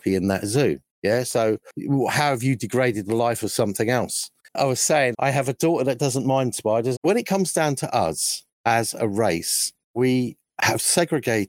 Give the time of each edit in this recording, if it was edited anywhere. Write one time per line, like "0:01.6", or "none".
0:05.1
0:07.0